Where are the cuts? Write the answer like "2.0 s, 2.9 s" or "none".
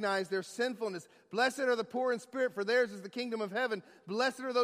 none